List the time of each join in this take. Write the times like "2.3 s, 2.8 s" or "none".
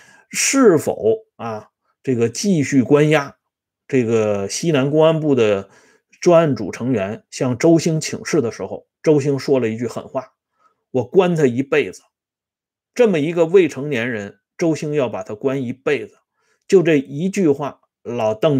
none